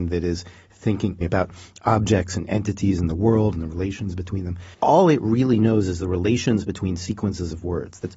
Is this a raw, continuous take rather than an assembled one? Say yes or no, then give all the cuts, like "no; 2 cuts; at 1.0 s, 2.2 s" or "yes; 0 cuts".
no; 1 cut; at 4.7 s